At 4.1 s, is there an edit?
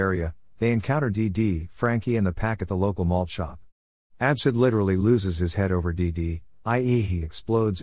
no; 0 cuts

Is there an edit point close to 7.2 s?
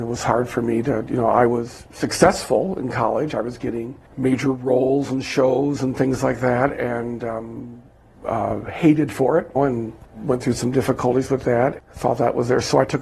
no; 2 cuts; at 9.6 s, 11.8 s

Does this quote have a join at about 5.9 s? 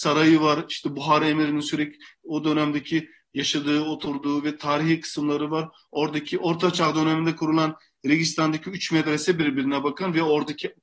yes; 1 cut; at 5.9 s

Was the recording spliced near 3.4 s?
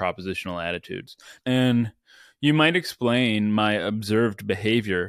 no; 1 cut; at 1.4 s

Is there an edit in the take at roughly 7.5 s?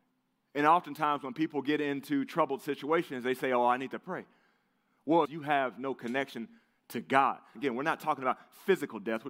yes; 2 cuts; at 5.2 s, 7.5 s

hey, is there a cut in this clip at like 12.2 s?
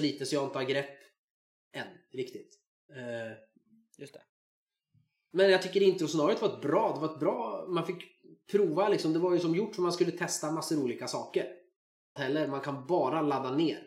yes; 1 cut; at 12.2 s

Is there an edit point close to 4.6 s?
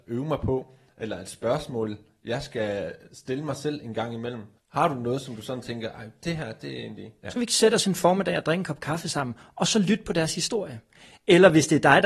yes; 2 cuts; at 4.6 s, 7.2 s

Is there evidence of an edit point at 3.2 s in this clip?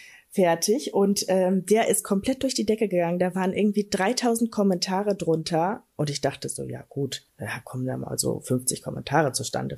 no; 1 cut; at 7.3 s

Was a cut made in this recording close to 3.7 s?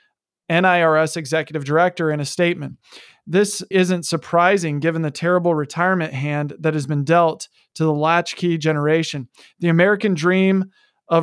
yes; 1 cut; at 3.7 s

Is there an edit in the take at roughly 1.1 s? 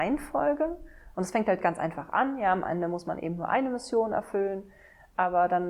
yes; 1 cut; at 1.1 s

